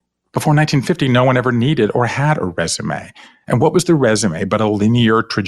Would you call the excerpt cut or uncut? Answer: uncut